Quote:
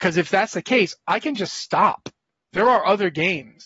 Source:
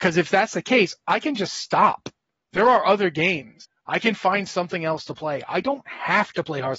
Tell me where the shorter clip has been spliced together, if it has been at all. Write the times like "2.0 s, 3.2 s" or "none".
none